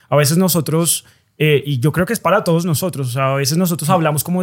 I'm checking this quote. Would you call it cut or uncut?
uncut